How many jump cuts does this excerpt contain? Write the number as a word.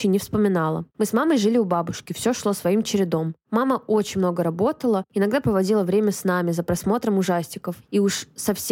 one